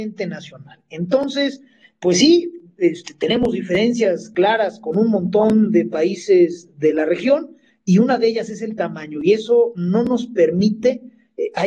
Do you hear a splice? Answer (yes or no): no